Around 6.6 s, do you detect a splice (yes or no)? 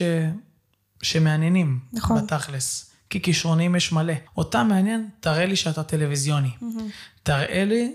no